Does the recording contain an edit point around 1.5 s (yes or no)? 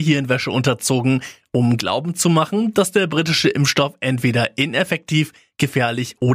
no